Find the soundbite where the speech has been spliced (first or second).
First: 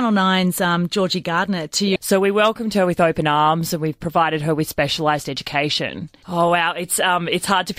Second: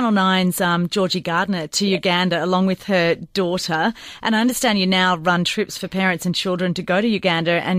first